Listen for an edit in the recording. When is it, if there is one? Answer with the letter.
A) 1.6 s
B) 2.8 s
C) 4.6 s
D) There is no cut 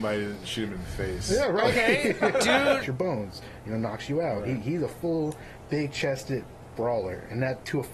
B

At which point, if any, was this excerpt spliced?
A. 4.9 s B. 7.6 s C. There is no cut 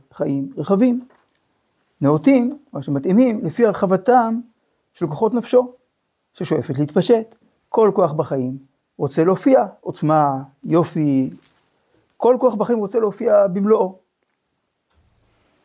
C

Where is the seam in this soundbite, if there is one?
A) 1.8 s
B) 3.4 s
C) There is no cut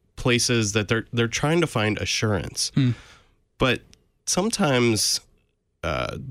C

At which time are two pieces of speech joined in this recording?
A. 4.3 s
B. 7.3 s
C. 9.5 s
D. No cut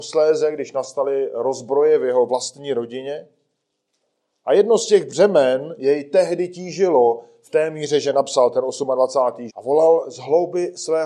C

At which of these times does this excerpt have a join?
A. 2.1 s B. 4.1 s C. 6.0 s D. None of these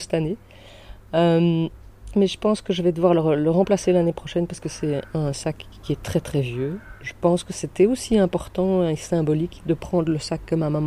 A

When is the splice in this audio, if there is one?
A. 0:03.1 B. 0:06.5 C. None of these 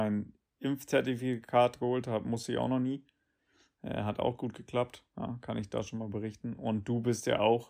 C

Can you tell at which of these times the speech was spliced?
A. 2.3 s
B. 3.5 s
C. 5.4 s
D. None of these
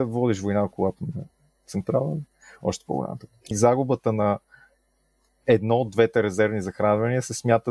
B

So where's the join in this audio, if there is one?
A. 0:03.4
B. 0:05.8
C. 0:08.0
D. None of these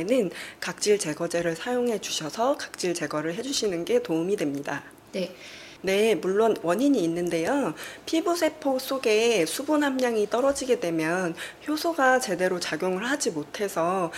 B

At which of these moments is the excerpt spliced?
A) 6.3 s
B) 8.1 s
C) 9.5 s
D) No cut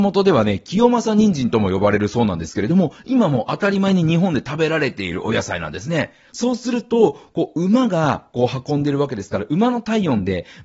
A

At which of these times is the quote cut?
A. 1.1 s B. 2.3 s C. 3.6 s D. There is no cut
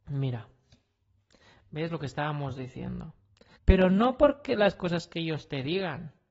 C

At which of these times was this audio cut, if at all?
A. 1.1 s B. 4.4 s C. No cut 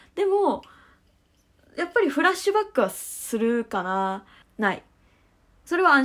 B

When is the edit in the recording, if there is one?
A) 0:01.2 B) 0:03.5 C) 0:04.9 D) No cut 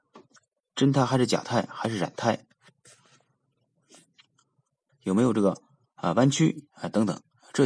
C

